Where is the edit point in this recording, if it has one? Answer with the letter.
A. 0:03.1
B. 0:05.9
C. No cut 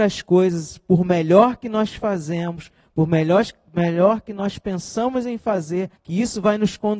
B